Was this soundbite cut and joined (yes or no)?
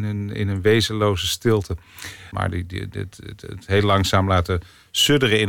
yes